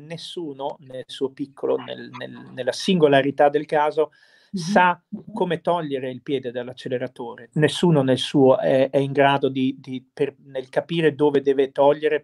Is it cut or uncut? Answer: cut